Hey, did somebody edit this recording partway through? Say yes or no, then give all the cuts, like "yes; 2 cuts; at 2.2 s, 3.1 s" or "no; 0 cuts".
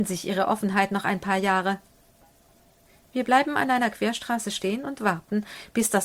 no; 0 cuts